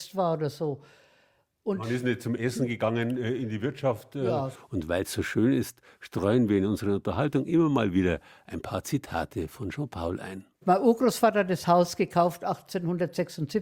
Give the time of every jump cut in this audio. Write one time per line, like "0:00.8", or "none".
0:04.5